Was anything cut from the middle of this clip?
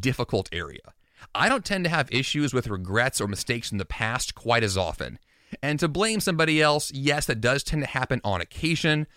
no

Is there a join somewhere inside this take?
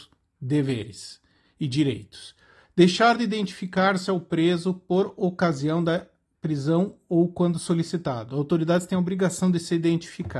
no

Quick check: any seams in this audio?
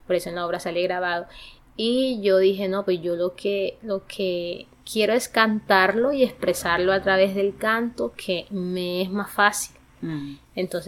no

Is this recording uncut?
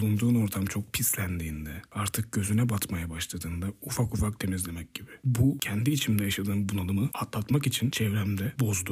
yes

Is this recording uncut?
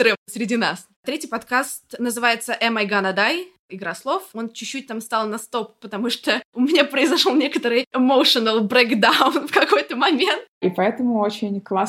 no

